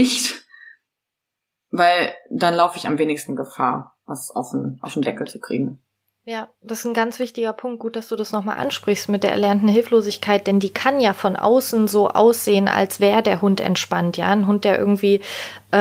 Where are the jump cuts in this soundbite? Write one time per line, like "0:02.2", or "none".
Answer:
none